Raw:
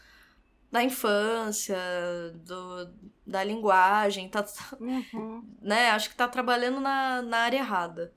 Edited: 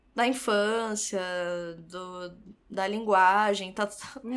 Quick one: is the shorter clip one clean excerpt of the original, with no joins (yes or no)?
yes